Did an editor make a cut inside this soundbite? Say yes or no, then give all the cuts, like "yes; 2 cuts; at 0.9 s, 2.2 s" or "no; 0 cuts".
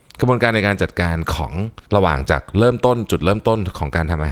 yes; 1 cut; at 1.9 s